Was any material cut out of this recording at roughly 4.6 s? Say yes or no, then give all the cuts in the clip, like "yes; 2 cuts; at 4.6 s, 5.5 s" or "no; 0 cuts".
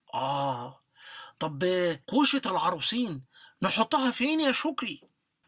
no; 1 cut; at 2.0 s